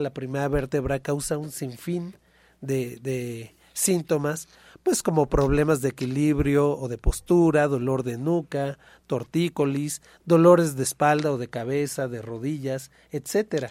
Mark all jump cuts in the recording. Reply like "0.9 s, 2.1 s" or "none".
none